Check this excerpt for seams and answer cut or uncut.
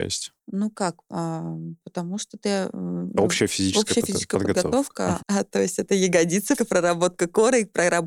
cut